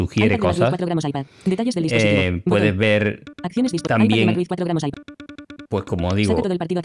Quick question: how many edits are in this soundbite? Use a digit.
0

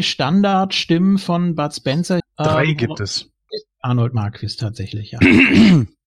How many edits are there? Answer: 2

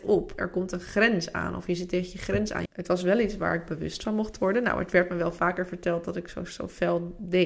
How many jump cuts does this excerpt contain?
1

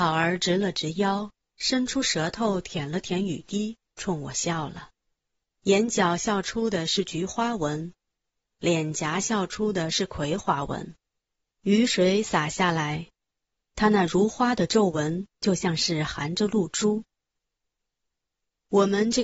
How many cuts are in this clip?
1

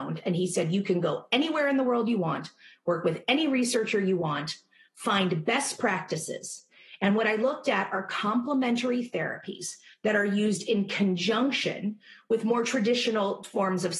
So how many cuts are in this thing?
0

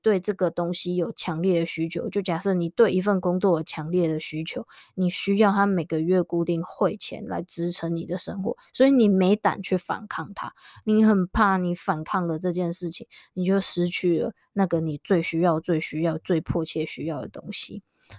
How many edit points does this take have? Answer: 0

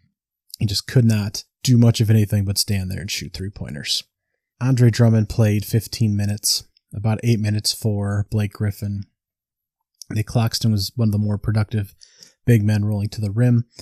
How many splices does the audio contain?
1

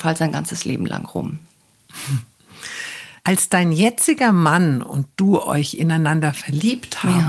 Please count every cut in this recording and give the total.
0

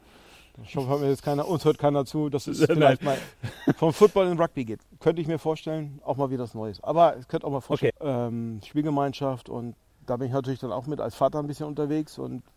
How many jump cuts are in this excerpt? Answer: 1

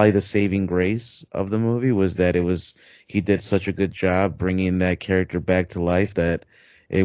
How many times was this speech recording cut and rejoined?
0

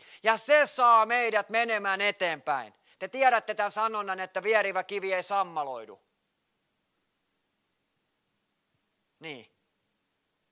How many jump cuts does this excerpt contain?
0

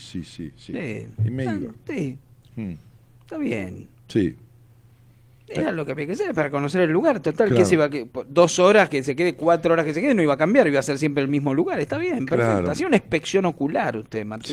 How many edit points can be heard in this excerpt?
0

